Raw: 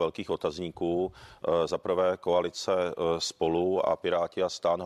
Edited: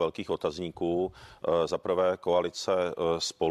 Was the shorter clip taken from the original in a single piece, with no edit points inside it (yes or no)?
yes